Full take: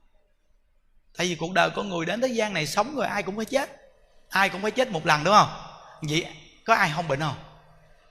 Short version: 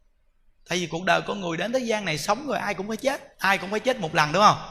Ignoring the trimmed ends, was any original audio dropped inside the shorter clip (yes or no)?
yes